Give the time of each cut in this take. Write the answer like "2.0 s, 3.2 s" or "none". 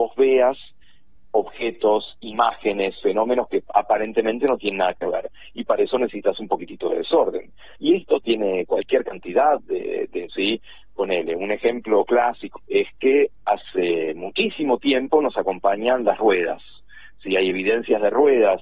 7.8 s, 10.3 s, 12.6 s